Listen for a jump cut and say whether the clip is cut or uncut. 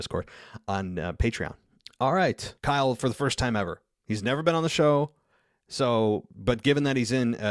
cut